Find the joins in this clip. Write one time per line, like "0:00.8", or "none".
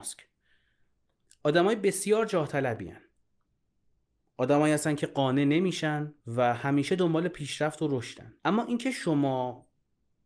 0:06.2
0:08.4